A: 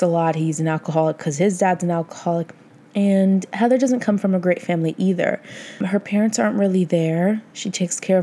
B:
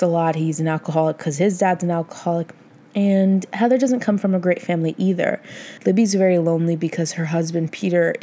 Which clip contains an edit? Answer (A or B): B